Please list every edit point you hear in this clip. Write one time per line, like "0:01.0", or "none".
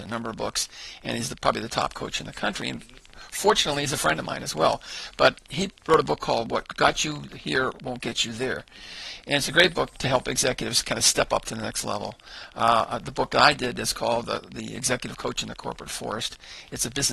none